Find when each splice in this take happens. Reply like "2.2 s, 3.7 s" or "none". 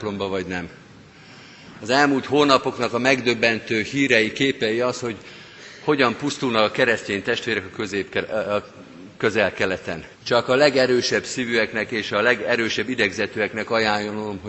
10.1 s